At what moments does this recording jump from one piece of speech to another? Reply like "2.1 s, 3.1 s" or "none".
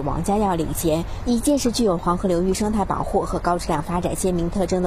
1.2 s